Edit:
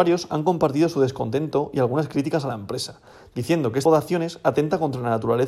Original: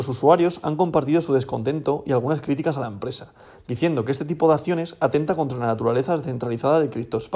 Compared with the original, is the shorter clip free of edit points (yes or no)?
no